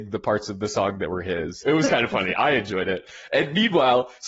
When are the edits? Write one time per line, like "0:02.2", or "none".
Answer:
0:01.6